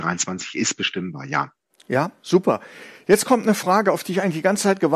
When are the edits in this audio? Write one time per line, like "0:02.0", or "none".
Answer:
none